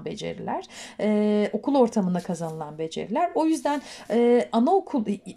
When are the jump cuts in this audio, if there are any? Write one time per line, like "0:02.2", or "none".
none